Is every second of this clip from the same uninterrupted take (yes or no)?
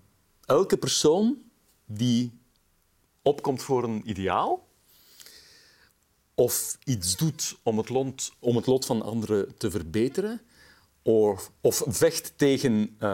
yes